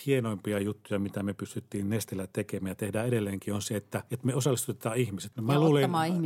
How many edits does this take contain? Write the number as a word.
one